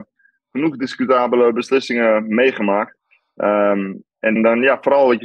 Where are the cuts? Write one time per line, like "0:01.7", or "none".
0:04.4